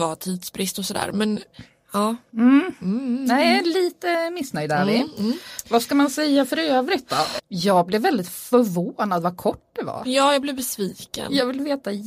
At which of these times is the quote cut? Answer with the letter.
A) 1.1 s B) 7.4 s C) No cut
B